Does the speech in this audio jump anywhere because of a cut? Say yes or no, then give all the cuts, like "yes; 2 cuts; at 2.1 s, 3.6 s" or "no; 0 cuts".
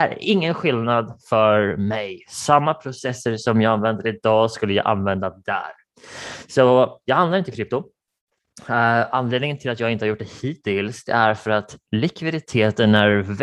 no; 0 cuts